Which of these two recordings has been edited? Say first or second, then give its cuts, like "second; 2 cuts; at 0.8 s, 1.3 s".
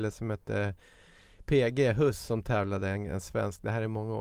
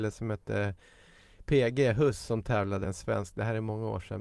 second; 1 cut; at 2.8 s